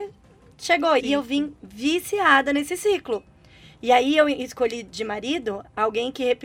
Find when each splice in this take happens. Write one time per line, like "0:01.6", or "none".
0:01.0